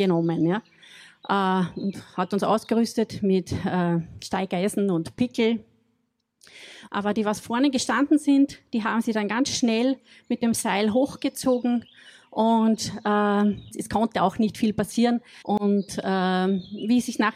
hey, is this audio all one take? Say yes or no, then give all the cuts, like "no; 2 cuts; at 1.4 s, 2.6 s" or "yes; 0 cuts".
no; 3 cuts; at 6.9 s, 13.7 s, 15.4 s